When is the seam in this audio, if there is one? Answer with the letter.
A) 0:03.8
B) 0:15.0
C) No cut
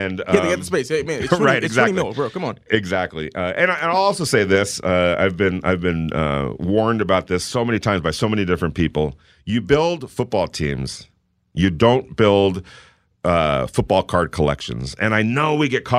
C